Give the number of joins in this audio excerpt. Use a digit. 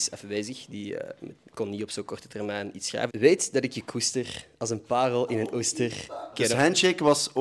2